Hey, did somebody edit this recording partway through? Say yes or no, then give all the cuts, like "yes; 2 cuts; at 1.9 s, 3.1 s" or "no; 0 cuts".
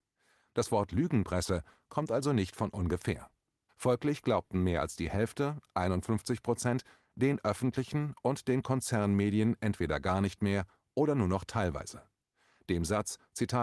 yes; 1 cut; at 3.7 s